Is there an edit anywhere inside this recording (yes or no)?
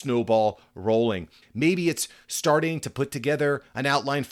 yes